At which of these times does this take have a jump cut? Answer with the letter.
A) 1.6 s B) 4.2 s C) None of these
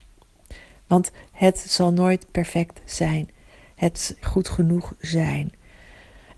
B